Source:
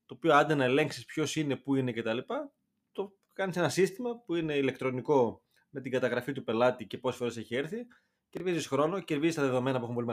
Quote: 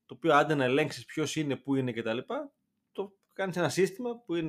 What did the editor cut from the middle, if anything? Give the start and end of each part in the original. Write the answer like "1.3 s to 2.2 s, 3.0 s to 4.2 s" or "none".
none